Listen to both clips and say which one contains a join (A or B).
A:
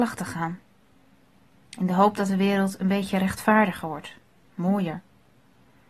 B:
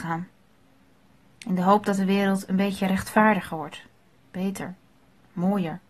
A